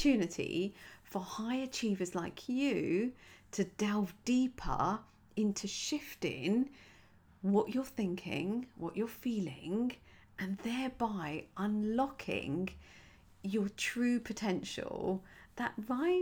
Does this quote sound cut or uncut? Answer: cut